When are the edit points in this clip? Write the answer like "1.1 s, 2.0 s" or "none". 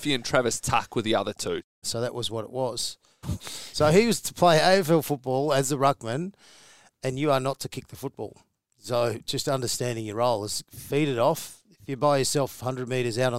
1.8 s, 3.2 s